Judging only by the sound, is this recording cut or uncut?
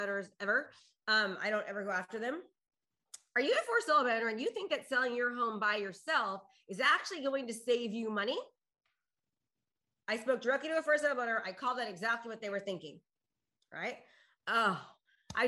uncut